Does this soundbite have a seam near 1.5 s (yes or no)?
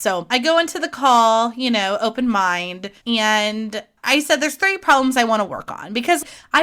no